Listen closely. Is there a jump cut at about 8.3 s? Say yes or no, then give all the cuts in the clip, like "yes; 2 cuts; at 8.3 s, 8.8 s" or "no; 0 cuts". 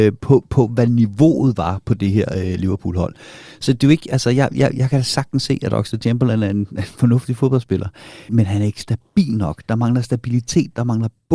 yes; 1 cut; at 8.3 s